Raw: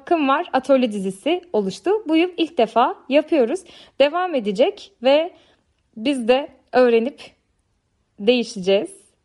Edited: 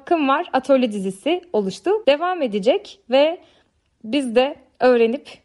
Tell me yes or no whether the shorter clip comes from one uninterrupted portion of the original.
no